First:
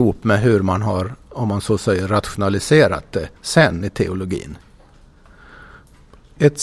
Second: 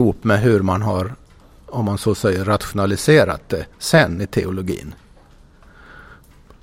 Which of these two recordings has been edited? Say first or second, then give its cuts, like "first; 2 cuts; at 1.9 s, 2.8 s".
first; 1 cut; at 1.2 s